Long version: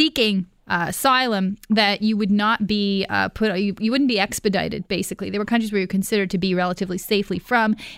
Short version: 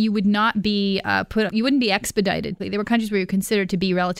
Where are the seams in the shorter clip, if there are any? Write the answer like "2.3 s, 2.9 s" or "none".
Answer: 1.5 s, 2.6 s